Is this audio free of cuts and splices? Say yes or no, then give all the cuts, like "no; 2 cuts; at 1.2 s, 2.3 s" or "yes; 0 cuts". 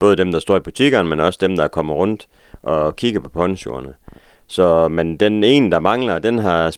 yes; 0 cuts